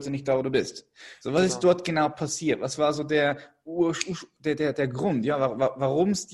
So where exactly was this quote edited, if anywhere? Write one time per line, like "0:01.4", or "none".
none

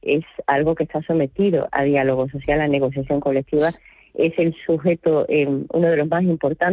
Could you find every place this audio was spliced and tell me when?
none

